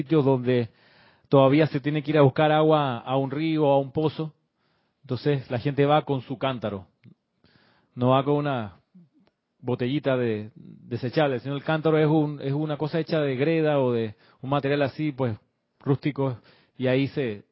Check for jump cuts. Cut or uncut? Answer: uncut